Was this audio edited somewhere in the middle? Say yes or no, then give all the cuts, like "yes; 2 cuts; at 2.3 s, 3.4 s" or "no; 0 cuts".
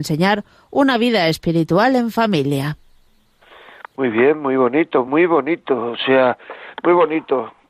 no; 0 cuts